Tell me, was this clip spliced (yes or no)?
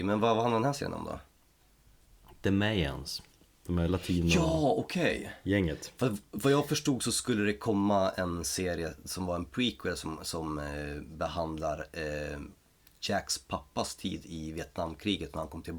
no